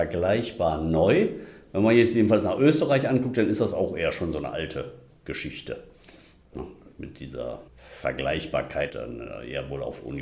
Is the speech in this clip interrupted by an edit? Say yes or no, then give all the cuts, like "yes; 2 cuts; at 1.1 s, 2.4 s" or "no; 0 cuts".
yes; 2 cuts; at 7.7 s, 8.9 s